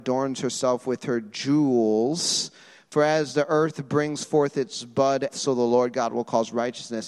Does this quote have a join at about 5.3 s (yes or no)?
yes